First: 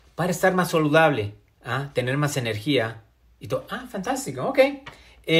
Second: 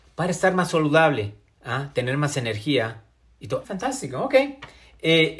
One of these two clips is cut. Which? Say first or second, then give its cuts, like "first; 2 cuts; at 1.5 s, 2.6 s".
second; 1 cut; at 3.6 s